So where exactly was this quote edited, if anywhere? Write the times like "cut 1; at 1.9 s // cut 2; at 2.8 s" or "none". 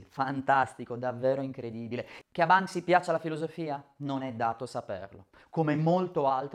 cut 1; at 2.2 s